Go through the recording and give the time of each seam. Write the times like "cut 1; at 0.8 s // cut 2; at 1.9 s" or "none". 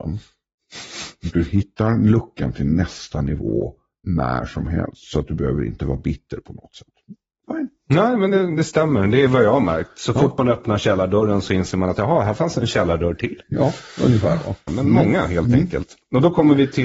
cut 1; at 14.7 s